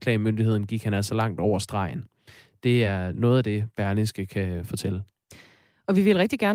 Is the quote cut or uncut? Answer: uncut